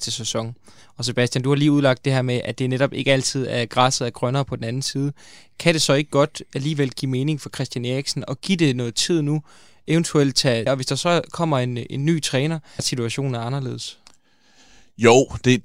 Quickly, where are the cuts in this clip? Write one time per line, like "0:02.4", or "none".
0:10.7
0:12.8